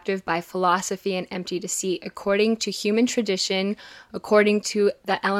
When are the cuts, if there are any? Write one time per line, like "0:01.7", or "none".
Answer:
none